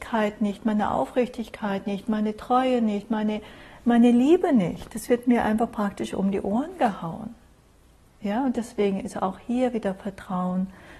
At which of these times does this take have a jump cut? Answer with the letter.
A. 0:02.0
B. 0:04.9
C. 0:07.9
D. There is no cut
D